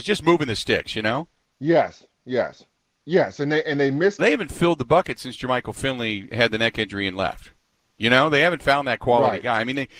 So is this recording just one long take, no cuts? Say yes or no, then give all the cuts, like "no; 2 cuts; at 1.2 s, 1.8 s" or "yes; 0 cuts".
no; 1 cut; at 4.2 s